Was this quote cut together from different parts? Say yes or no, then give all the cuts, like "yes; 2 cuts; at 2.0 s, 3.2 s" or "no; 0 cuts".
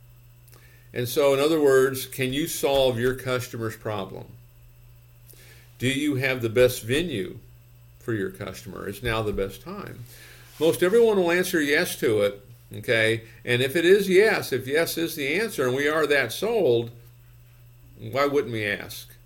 no; 0 cuts